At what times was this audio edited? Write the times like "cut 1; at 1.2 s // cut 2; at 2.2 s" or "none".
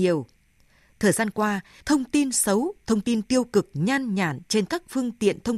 cut 1; at 1.8 s